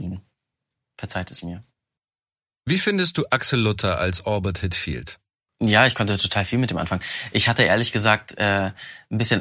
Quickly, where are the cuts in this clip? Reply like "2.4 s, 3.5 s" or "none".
5.5 s